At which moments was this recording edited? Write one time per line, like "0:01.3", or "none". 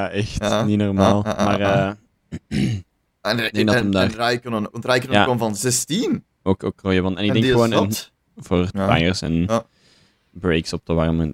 0:04.7
0:08.2